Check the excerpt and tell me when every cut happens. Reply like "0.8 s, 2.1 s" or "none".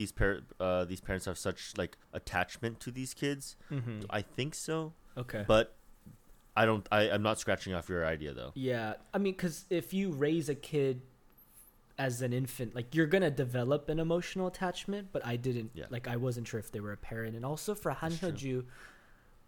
2.0 s, 4.0 s